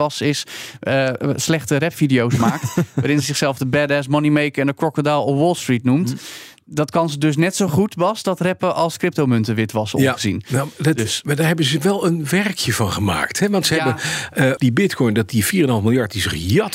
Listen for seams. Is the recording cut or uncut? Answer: cut